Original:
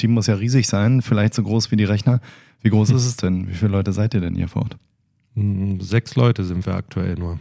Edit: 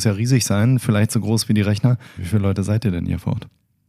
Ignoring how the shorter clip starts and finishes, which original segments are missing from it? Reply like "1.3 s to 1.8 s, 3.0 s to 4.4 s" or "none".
2.4 s to 3.5 s

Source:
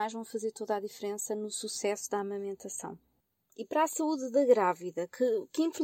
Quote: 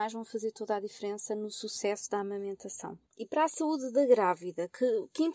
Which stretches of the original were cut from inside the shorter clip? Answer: 3.1 s to 3.4 s

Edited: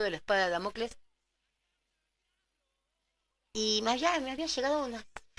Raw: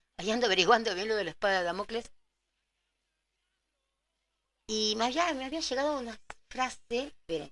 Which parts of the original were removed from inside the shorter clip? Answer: none

